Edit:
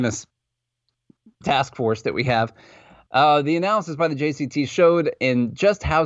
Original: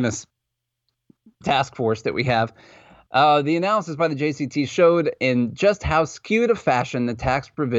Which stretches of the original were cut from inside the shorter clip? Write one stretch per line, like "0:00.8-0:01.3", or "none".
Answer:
none